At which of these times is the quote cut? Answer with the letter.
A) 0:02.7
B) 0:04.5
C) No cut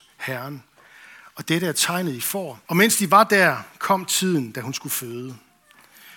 A